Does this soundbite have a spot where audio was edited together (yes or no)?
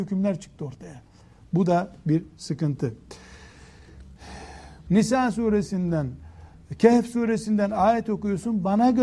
yes